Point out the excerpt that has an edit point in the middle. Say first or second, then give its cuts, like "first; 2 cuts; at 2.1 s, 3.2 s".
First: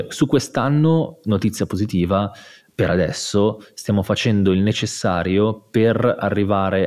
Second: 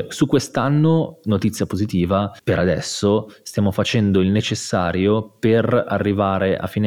second; 1 cut; at 2.4 s